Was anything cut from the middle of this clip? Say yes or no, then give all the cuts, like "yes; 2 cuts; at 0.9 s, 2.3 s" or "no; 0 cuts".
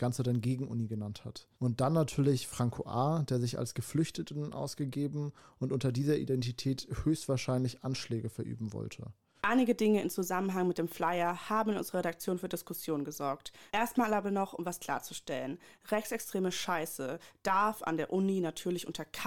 yes; 3 cuts; at 1.5 s, 9.4 s, 13.7 s